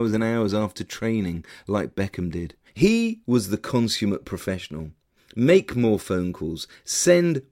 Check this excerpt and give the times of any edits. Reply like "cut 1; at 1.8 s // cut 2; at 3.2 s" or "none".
cut 1; at 2.7 s // cut 2; at 5.2 s

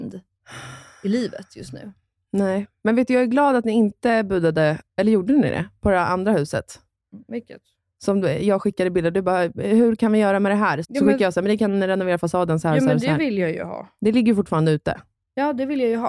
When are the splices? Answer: cut 1; at 10.8 s

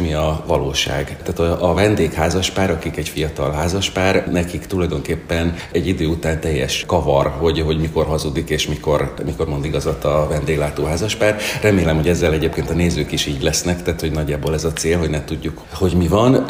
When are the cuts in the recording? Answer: none

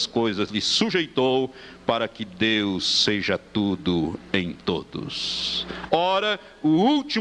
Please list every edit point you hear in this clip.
cut 1; at 5.9 s

